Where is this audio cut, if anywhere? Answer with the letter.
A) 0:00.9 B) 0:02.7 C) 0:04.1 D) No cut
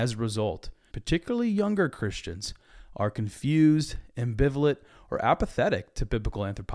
A